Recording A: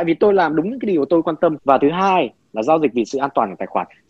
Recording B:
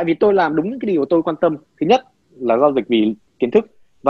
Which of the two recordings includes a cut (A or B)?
A